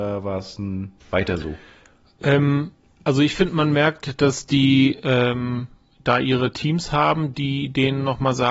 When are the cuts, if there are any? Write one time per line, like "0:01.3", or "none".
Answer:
0:01.0